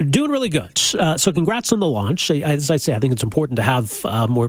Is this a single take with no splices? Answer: yes; 0 cuts

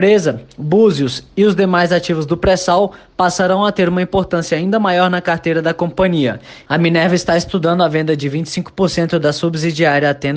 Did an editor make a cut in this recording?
yes; 1 cut; at 6.6 s

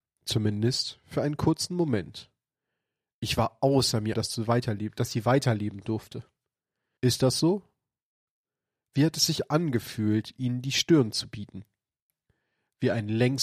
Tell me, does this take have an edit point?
yes; 2 cuts; at 4.1 s, 7.0 s

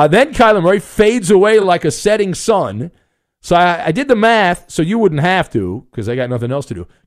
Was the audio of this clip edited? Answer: no; 0 cuts

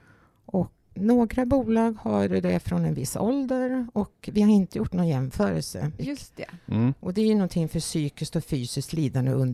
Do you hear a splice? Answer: yes; 2 cuts; at 0.9 s, 6.0 s

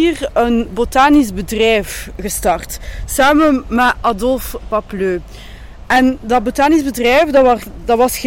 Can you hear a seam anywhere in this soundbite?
no; 0 cuts

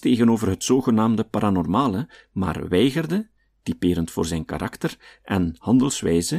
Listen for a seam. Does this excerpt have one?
no; 0 cuts

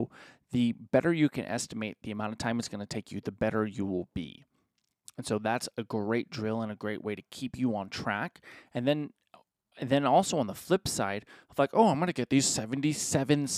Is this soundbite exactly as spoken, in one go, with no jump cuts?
yes; 0 cuts

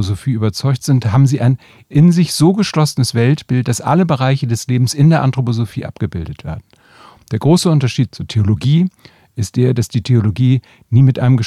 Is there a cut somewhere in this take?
no; 0 cuts

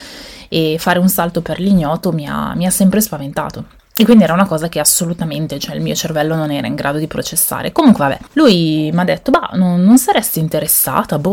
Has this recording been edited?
no; 0 cuts

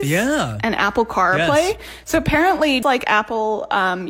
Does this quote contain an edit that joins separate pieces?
yes; 1 cut; at 2.8 s

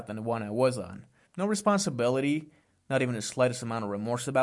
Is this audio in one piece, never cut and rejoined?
no; 1 cut; at 1.3 s

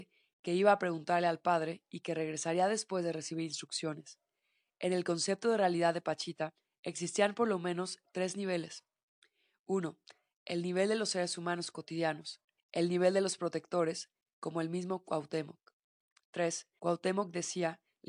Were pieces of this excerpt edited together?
yes; 2 cuts; at 12.6 s, 16.8 s

